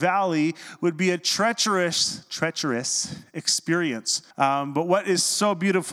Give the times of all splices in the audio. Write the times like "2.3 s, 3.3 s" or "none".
4.3 s